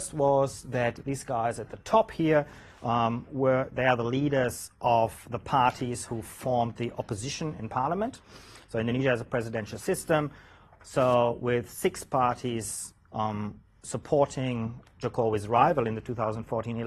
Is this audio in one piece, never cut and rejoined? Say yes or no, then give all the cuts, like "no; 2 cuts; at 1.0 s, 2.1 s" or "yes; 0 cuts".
yes; 0 cuts